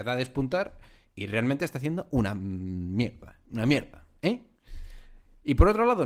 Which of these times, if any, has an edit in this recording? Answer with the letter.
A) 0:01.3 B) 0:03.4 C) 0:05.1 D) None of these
D